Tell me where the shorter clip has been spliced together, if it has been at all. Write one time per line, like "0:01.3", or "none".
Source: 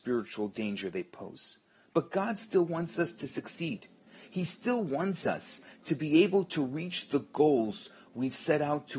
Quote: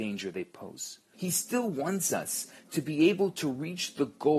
0:01.1